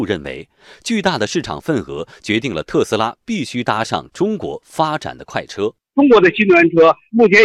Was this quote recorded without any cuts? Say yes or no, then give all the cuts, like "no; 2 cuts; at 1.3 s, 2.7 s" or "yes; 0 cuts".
yes; 0 cuts